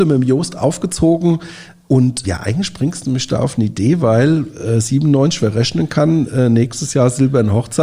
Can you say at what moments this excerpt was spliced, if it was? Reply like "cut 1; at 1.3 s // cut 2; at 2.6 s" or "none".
cut 1; at 2.2 s